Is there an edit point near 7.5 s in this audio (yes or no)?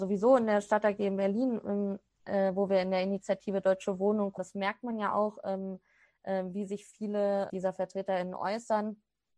yes